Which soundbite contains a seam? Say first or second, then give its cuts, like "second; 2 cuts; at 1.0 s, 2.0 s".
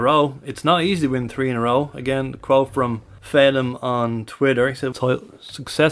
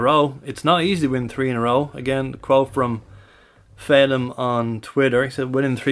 first; 2 cuts; at 3.2 s, 4.9 s